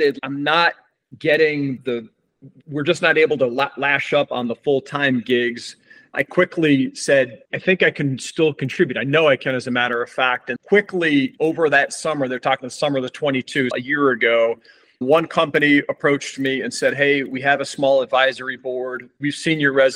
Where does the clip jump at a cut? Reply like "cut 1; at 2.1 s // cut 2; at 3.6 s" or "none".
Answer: cut 1; at 7.5 s // cut 2; at 10.6 s // cut 3; at 13.7 s